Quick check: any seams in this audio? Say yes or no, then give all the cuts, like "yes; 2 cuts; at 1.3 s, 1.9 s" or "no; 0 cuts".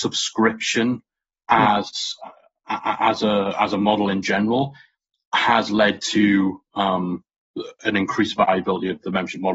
no; 0 cuts